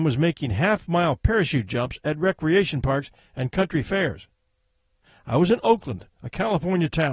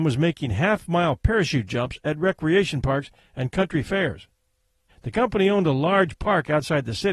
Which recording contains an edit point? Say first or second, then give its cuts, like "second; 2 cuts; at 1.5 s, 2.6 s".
second; 1 cut; at 4.9 s